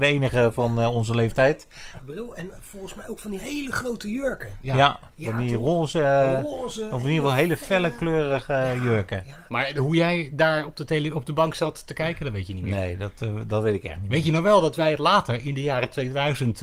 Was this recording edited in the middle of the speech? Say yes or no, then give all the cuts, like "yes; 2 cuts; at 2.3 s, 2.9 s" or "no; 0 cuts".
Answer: yes; 1 cut; at 2.0 s